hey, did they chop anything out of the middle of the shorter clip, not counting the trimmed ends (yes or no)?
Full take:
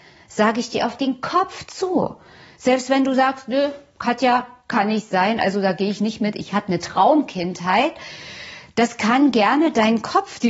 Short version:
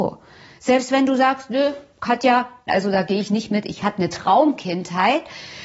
yes